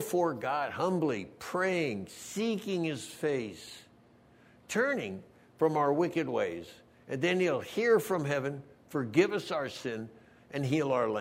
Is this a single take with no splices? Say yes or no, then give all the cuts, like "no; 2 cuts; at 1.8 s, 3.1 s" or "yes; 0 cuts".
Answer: yes; 0 cuts